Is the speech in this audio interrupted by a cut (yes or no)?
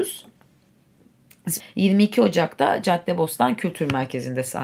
yes